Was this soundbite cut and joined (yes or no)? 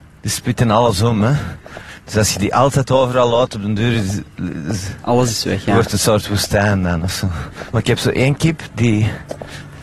no